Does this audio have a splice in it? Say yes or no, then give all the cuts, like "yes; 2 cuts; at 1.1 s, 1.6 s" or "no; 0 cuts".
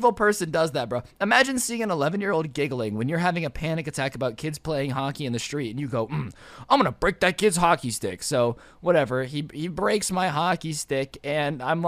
no; 0 cuts